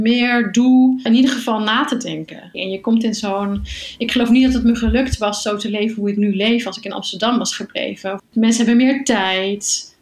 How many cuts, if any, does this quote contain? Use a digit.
2